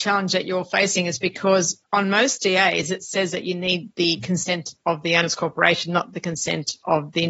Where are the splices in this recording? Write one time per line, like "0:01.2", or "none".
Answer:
none